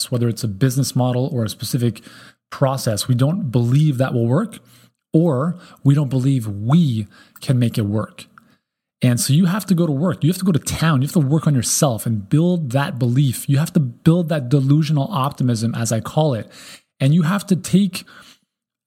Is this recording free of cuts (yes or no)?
yes